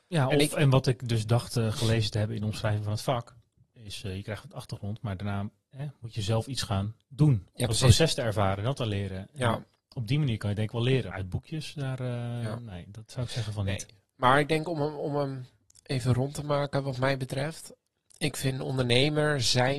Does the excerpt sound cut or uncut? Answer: cut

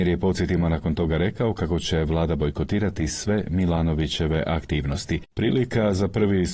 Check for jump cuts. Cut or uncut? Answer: uncut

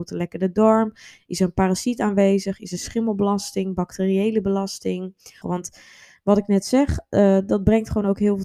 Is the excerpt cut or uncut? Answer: cut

